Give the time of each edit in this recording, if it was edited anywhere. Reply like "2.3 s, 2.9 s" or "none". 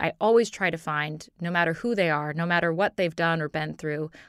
none